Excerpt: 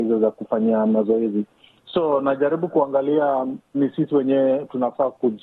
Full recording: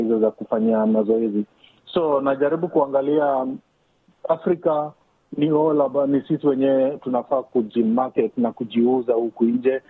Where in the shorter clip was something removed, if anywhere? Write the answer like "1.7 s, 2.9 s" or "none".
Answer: 3.7 s